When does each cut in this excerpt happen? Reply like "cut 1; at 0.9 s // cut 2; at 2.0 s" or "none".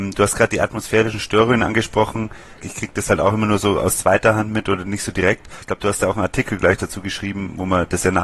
cut 1; at 2.6 s // cut 2; at 5.6 s